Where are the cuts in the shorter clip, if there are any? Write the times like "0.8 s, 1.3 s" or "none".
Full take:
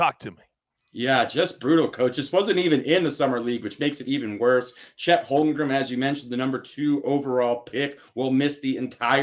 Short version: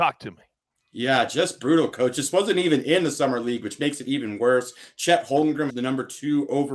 5.7 s

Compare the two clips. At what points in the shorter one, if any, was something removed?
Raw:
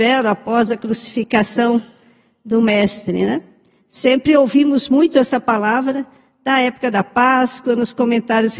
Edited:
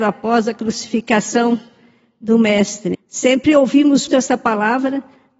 2.9 s, 4.1 s

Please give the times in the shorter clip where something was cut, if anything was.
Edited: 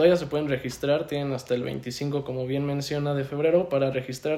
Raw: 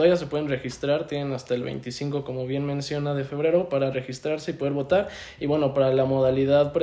none

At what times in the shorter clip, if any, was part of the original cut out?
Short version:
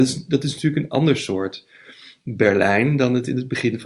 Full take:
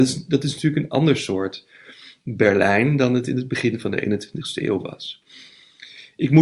none

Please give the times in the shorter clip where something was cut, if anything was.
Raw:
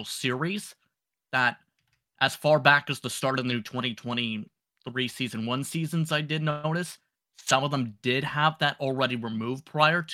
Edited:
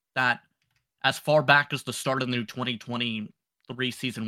none

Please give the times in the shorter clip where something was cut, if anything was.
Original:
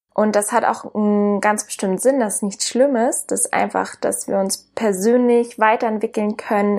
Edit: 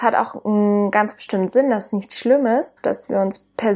2.8 s

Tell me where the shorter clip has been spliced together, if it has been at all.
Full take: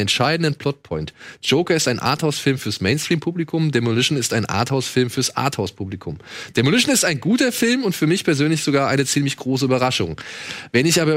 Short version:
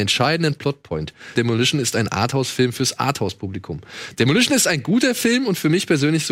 1.4 s

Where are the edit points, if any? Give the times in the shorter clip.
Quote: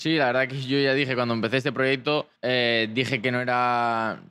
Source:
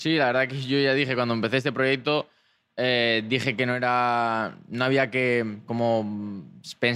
2.4 s

